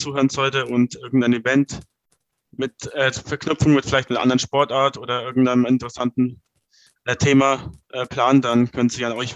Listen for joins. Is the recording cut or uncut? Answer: uncut